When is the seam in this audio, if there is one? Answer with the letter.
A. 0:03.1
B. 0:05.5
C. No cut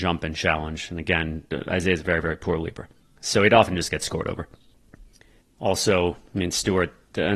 C